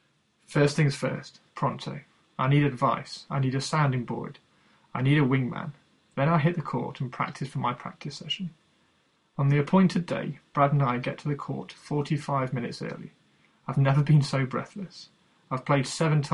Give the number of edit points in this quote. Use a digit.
1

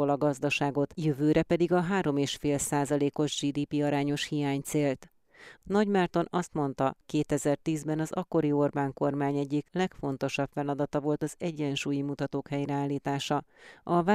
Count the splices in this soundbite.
2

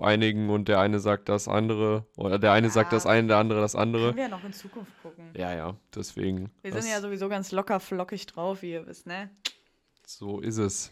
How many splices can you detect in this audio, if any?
0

